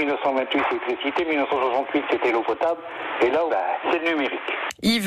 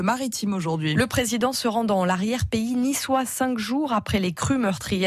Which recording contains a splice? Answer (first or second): first